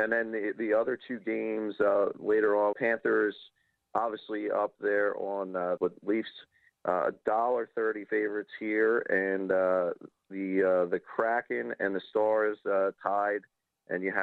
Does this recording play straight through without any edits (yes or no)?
no